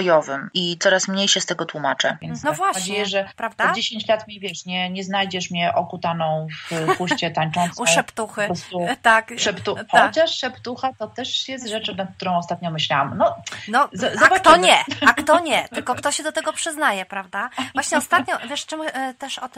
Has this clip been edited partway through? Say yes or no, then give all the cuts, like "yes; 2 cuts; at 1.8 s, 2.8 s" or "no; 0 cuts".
yes; 1 cut; at 2.4 s